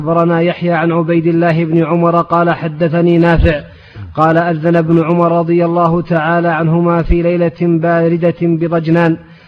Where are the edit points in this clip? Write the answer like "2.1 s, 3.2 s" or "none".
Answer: none